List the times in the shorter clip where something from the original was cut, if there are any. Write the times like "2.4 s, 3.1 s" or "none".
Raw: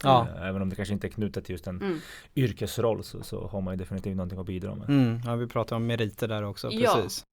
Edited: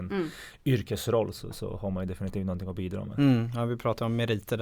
none